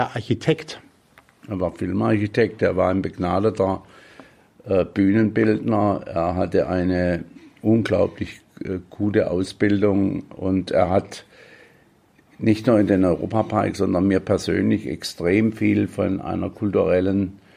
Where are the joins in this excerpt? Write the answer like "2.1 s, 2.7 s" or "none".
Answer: none